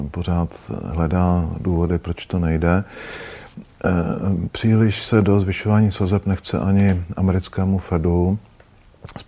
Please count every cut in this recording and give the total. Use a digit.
0